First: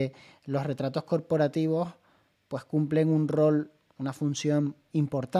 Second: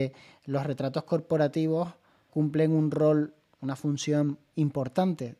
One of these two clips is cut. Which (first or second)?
second